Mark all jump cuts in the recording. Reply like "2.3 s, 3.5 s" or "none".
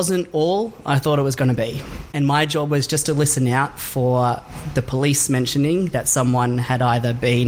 2.1 s